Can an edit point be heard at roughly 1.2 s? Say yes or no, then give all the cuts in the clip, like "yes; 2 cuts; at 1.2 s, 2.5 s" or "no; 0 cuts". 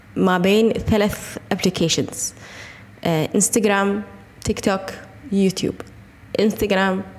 no; 0 cuts